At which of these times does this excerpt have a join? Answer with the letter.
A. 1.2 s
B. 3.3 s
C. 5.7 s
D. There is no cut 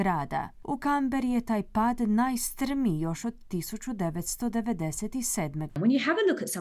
C